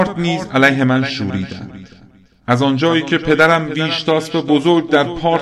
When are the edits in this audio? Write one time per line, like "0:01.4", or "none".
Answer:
none